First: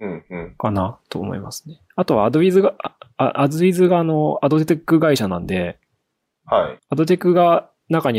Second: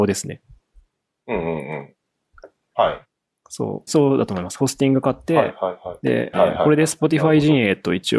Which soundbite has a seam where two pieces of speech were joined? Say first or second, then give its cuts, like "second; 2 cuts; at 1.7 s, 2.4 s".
second; 3 cuts; at 2.7 s, 3.9 s, 6.3 s